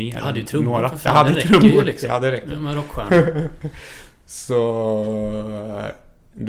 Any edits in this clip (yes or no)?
no